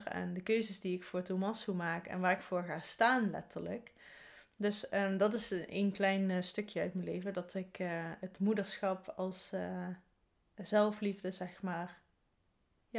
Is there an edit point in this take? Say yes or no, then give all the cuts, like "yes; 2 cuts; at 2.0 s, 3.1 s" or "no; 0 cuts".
no; 0 cuts